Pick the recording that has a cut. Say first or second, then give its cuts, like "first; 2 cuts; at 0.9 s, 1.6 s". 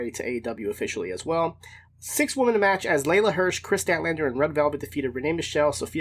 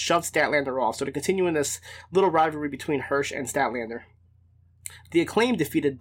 first; 1 cut; at 1.9 s